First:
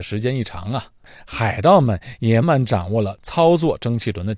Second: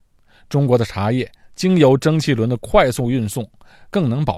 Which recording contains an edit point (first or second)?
first